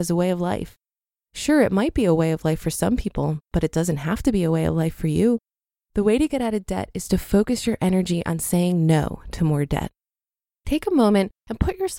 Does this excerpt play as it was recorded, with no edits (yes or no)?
yes